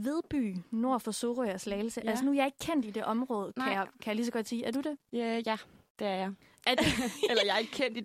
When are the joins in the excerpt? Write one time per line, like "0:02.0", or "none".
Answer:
none